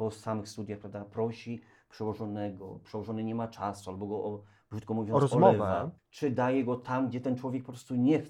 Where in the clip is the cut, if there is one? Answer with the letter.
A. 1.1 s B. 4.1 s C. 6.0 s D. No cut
C